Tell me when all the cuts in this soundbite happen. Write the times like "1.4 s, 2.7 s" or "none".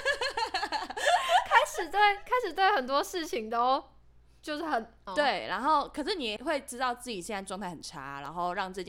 5.1 s, 6.4 s